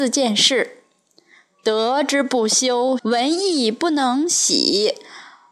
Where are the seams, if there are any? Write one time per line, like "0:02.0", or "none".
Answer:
0:03.0